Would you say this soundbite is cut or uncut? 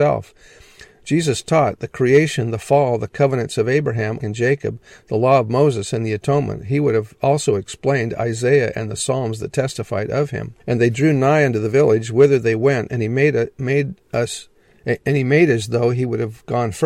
cut